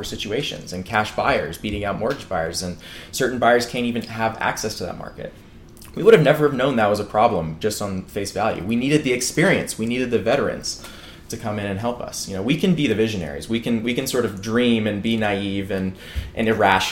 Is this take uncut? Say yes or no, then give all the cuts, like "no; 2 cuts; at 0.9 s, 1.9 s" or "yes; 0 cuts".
yes; 0 cuts